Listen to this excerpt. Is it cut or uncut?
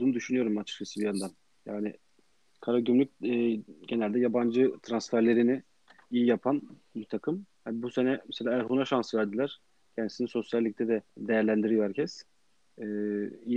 cut